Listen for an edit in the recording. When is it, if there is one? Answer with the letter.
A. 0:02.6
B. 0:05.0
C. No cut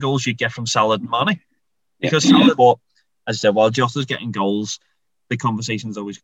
A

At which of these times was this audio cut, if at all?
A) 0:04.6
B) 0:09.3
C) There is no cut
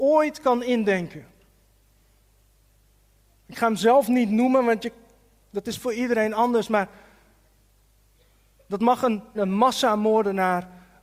B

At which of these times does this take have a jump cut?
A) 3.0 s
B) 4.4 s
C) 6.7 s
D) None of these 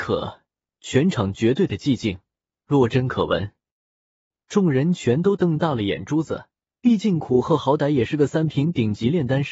C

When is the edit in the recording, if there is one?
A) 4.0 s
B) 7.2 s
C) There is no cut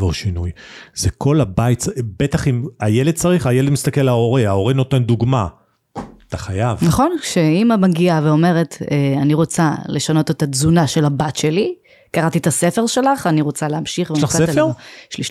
C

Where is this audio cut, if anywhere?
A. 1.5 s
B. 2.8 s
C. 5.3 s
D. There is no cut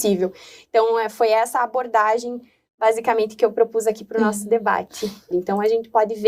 C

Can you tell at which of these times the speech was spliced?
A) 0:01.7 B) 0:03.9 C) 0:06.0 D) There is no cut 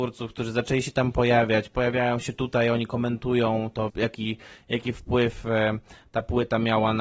B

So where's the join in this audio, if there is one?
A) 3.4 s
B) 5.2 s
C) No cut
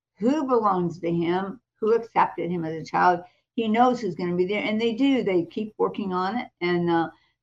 C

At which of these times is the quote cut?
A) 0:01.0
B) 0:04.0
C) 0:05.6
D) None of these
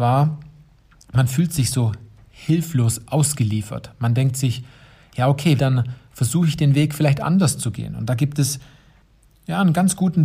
C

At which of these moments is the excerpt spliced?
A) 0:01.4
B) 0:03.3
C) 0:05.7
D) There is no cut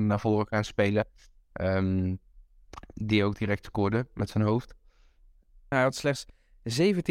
C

